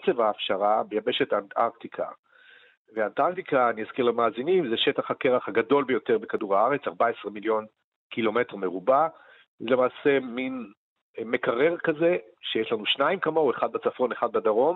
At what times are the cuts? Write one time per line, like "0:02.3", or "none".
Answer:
none